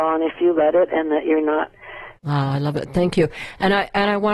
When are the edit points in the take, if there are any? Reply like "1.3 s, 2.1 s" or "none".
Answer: 2.2 s